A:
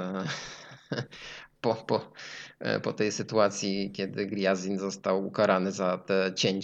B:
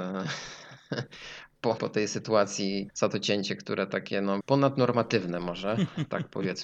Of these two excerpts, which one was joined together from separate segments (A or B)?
B